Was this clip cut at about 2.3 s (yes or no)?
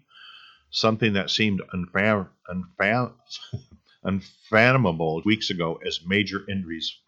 no